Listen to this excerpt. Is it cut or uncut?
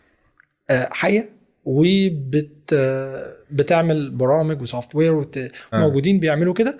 cut